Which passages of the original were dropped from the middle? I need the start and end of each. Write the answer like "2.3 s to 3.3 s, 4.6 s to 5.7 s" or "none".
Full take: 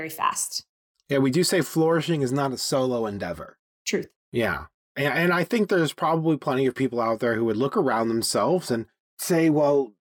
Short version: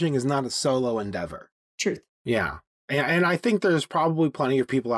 none